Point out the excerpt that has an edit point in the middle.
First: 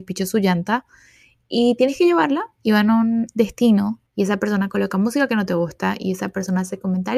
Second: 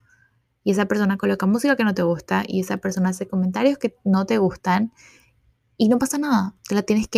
first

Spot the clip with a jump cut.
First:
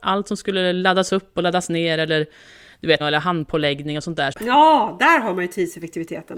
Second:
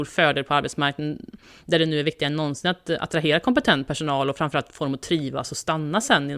first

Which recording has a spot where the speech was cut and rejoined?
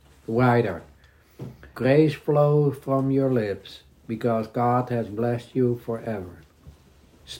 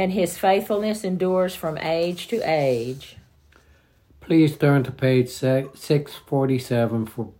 first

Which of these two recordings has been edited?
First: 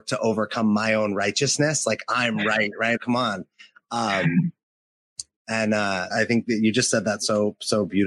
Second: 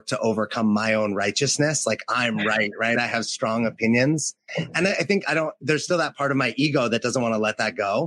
first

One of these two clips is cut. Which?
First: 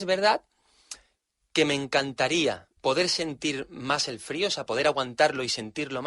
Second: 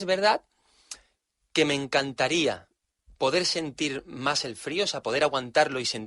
first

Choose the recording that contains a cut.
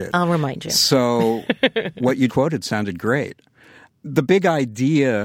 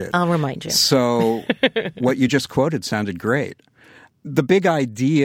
first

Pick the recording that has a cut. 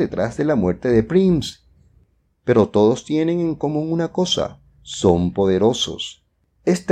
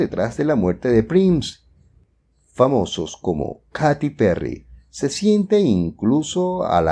first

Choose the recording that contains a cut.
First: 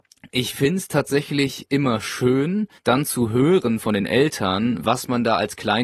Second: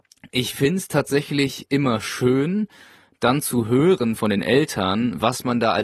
first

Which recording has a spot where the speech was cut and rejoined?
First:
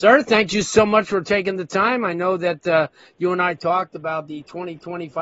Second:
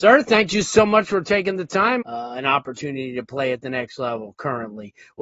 second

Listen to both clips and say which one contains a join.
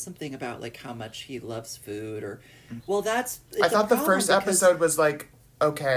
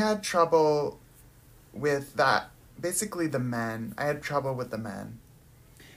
first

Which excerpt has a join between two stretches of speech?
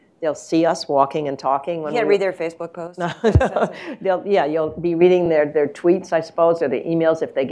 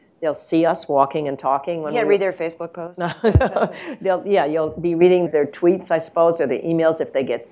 second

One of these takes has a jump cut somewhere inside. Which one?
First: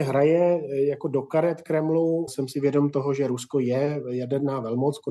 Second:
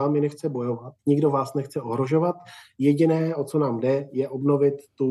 first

